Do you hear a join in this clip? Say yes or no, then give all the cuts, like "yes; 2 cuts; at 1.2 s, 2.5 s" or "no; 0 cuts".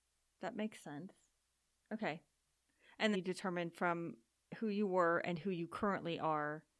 yes; 1 cut; at 3.1 s